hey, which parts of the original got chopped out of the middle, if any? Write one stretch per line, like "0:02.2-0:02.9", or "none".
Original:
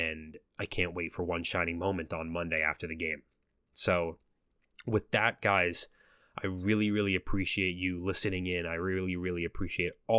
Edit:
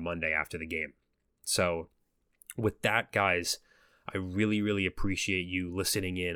none